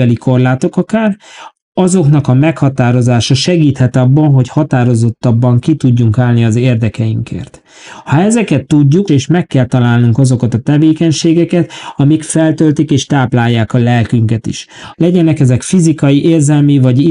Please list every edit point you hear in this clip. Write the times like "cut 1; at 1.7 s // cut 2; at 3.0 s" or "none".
cut 1; at 9.1 s // cut 2; at 14.9 s